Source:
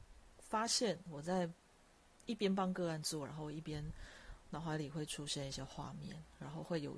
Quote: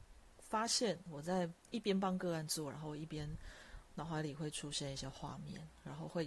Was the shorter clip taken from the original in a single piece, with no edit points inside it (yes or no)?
no